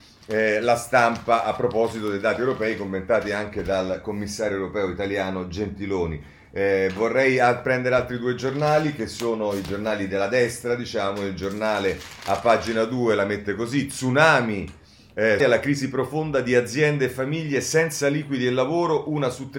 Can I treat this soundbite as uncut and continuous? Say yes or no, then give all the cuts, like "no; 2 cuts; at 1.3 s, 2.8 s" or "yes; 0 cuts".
no; 1 cut; at 15.4 s